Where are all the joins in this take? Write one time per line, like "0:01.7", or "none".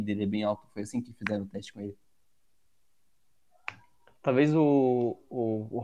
none